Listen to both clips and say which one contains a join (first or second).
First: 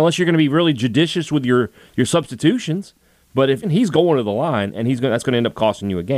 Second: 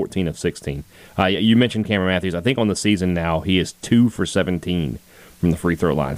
first